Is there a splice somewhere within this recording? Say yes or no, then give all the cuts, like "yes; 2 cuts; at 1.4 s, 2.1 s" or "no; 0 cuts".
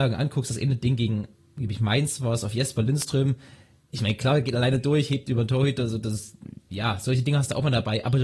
no; 0 cuts